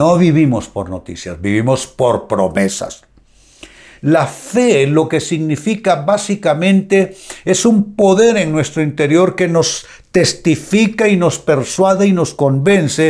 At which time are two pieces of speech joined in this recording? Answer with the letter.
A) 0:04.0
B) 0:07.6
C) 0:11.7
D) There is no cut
A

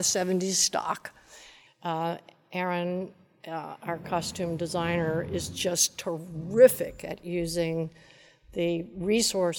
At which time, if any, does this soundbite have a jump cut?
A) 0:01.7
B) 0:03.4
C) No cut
A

